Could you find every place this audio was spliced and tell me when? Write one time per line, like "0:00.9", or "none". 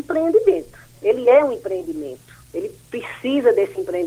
none